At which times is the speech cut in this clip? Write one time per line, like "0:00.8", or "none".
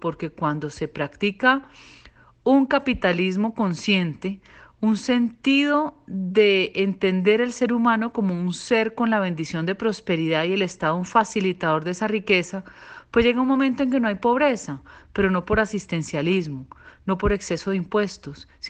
none